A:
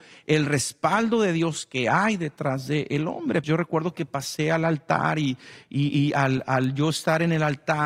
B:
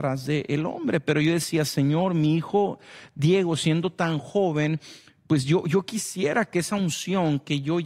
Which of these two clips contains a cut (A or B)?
A